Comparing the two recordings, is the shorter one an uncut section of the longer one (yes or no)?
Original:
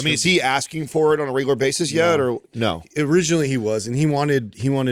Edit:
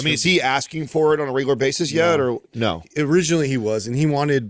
yes